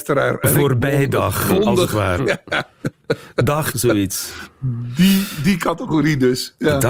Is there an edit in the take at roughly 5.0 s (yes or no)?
no